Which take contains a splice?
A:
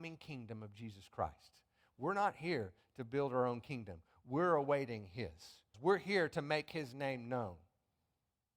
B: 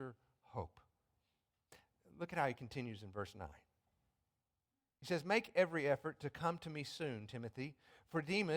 A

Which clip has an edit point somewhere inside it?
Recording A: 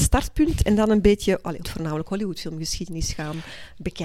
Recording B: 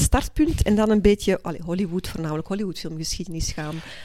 A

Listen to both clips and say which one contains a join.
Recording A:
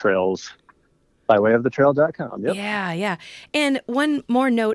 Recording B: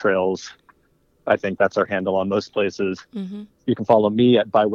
A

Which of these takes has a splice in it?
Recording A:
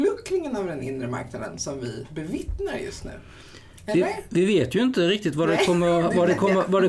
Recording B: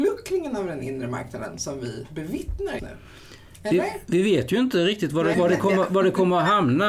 B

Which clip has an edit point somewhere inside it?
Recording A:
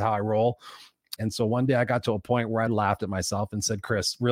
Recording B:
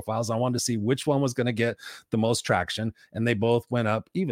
A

